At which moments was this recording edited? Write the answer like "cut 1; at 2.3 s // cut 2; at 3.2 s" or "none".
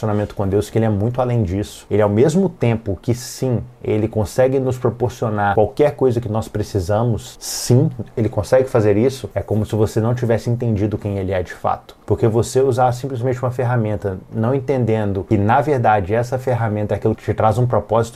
cut 1; at 9.3 s